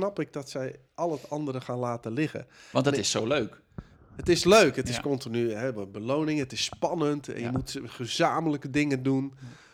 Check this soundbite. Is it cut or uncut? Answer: uncut